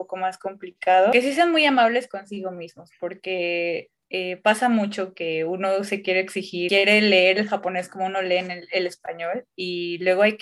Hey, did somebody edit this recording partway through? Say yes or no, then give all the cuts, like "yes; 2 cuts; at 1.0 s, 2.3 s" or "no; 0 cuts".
no; 0 cuts